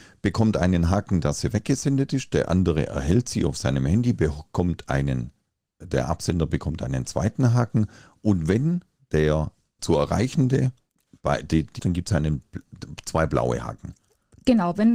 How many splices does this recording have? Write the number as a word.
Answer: two